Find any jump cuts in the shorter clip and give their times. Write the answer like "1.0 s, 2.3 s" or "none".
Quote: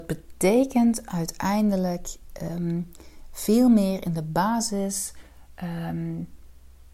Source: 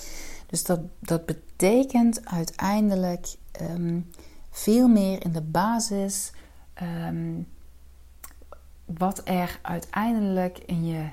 none